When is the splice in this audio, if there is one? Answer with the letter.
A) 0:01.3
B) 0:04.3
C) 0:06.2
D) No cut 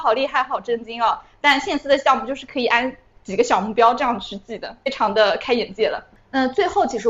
C